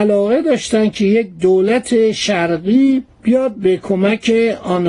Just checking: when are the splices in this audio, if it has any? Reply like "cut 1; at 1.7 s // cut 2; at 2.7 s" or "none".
cut 1; at 3.1 s